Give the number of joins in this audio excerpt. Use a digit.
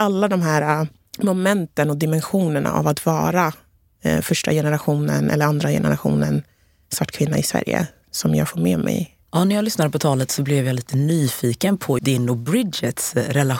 1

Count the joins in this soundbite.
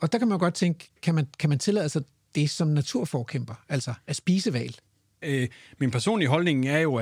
1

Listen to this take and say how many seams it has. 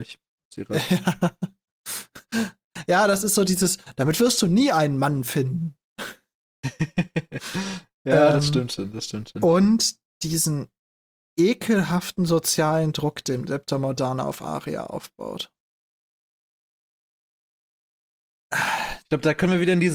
0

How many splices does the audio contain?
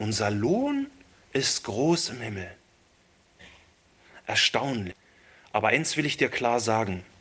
0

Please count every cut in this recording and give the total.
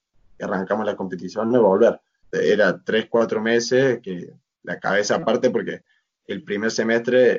1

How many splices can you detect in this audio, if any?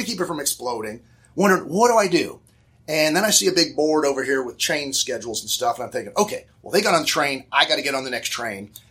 0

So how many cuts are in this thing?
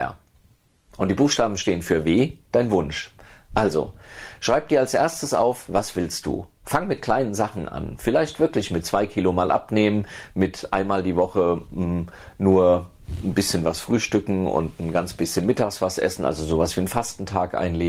0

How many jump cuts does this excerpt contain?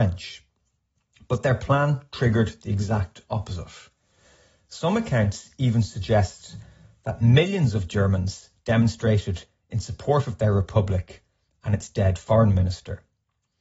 0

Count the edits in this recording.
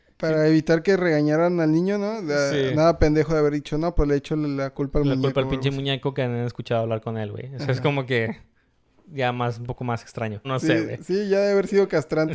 1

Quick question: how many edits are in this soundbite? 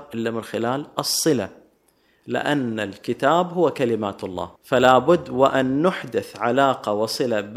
1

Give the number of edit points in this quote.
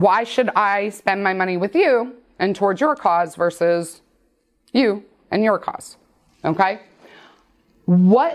0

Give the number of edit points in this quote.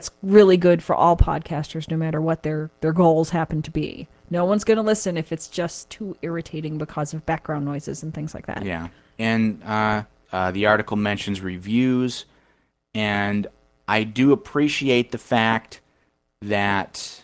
1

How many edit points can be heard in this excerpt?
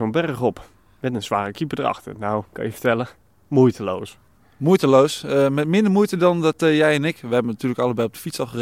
0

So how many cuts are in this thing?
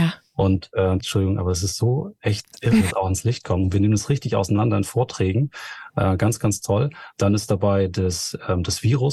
2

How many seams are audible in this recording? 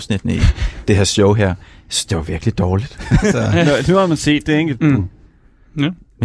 2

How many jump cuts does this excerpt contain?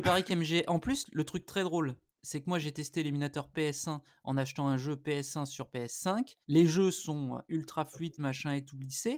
2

